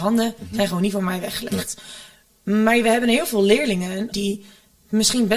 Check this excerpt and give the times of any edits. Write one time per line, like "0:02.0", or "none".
0:04.1

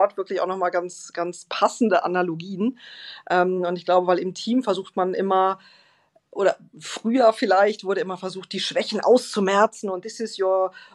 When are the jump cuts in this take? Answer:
none

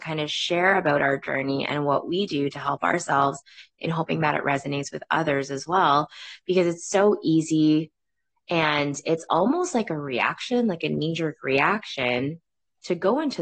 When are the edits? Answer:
none

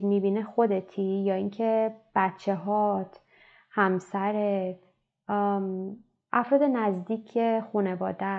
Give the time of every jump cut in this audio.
none

